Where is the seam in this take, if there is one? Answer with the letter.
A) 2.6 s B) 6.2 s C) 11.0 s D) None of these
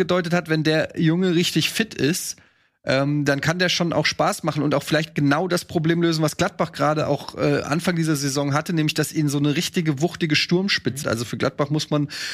C